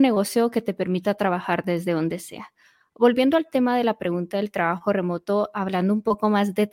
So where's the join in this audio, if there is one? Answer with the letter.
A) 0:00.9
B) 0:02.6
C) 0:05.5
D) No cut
D